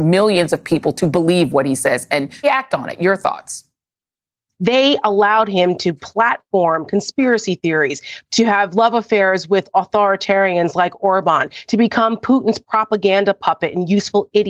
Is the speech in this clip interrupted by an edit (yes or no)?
yes